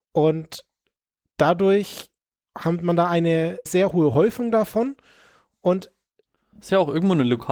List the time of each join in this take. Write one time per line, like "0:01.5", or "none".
0:03.7